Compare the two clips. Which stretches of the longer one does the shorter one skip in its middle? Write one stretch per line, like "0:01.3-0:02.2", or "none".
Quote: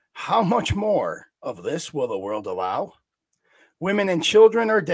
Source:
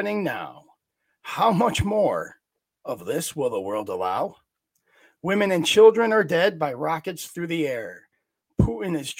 0:02.4-0:02.8